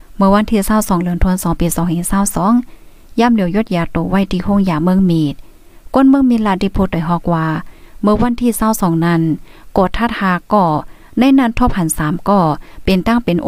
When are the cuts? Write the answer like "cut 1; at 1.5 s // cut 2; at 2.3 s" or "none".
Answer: none

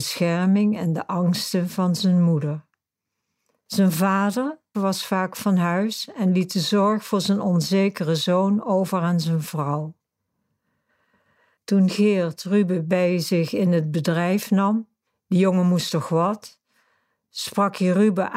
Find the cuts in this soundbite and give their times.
cut 1; at 4.7 s

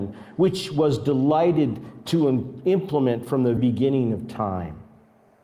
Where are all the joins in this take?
cut 1; at 3.6 s

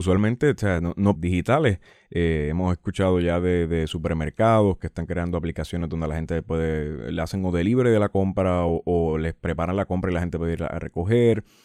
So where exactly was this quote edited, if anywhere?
cut 1; at 1.1 s

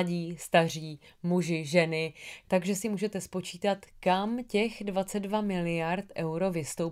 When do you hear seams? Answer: cut 1; at 2.4 s

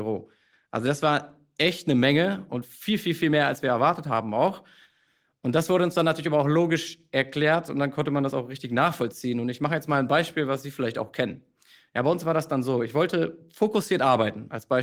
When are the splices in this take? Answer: none

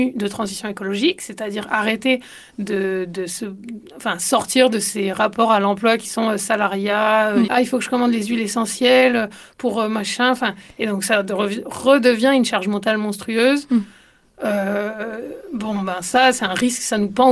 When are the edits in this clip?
cut 1; at 7.5 s

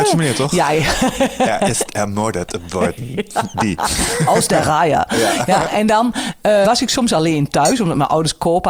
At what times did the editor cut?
cut 1; at 6.6 s

